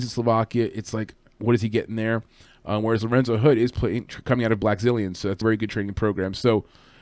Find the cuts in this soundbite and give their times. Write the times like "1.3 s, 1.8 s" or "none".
5.4 s

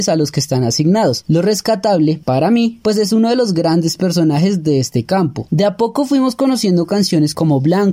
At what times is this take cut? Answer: 1.2 s, 2.8 s, 5.5 s

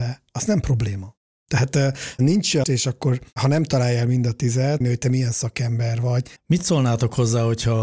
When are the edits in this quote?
2.6 s, 4.8 s, 6.4 s

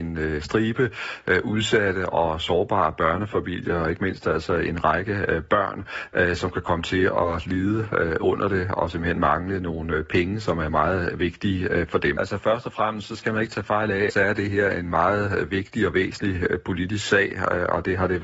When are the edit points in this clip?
12.2 s, 14.1 s

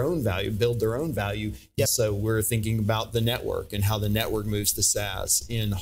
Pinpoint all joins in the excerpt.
1.9 s

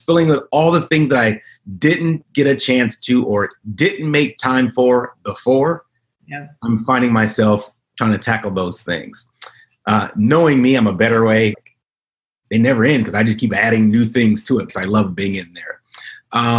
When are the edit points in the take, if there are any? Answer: 11.5 s, 14.7 s

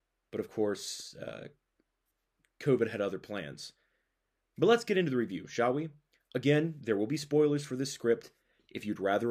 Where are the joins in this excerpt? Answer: none

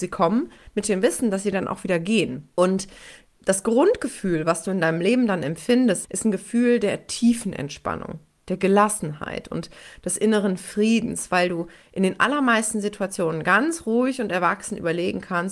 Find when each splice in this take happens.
2.5 s, 6.0 s

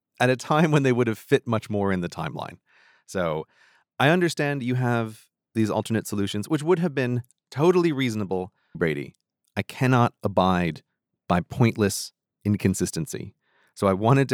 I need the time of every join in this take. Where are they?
8.7 s

